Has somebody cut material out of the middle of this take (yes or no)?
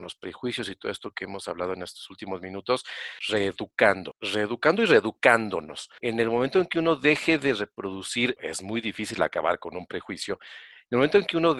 yes